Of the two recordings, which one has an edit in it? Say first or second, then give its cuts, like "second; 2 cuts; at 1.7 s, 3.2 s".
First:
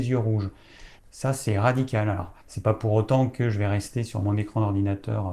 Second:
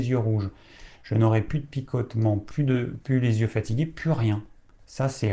first; 2 cuts; at 1.0 s, 2.4 s